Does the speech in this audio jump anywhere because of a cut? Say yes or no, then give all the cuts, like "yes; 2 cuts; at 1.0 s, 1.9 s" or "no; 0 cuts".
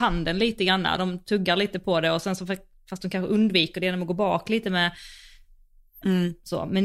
no; 0 cuts